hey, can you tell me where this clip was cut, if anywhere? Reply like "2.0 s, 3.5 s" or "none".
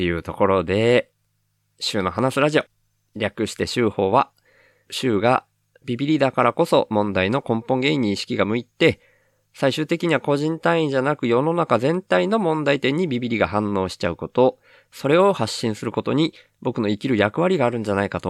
4.9 s

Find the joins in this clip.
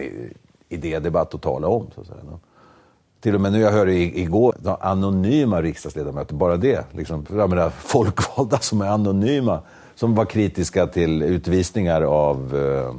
4.5 s

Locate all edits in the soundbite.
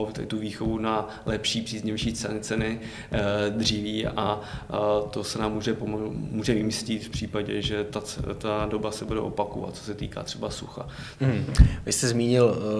11.2 s

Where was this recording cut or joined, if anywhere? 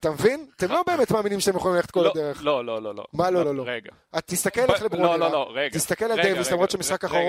3.4 s

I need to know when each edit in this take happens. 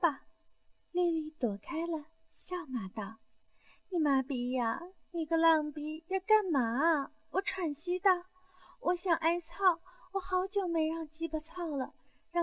none

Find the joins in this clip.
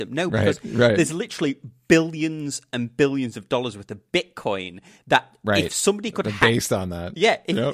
none

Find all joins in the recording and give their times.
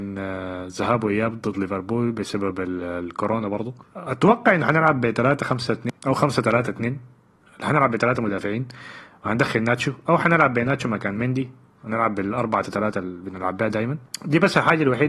12.6 s

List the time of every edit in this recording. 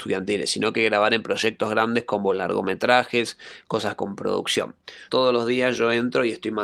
5.1 s

